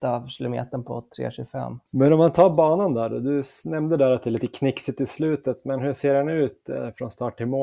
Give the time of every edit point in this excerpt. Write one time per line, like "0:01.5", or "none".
0:01.8